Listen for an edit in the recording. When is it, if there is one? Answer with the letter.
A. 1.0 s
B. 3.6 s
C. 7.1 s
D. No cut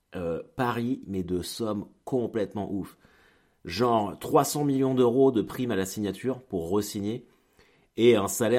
A